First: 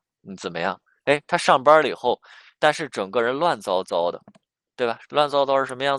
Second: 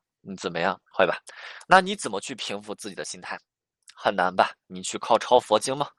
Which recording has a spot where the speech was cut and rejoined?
second; 1 cut; at 0.9 s

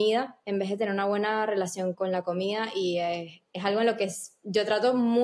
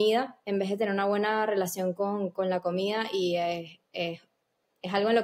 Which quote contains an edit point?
first; 2 cuts; at 1.9 s, 3.5 s

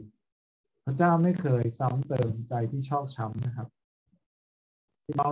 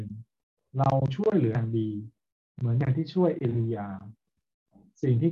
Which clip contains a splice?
second; 1 cut; at 1.5 s

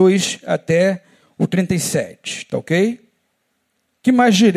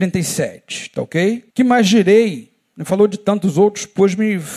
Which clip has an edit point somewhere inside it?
second; 1 cut; at 1.5 s

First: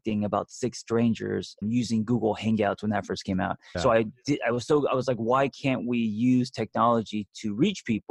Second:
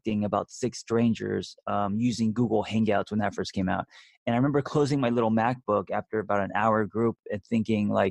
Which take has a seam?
first; 2 cuts; at 1.6 s, 3.7 s

